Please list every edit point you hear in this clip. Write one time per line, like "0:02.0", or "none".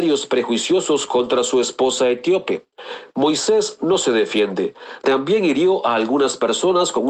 0:05.0